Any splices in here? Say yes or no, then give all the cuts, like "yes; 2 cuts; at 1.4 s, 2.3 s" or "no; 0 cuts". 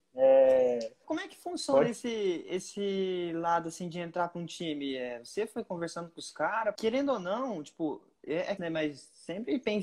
yes; 3 cuts; at 1.0 s, 6.8 s, 8.6 s